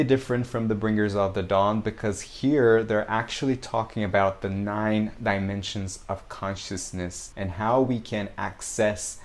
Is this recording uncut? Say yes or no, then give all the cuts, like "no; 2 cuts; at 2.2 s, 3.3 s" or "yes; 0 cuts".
no; 1 cut; at 7.3 s